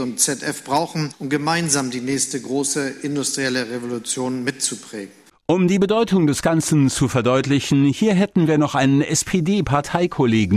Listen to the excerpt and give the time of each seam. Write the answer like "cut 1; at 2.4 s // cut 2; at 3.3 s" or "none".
cut 1; at 5.3 s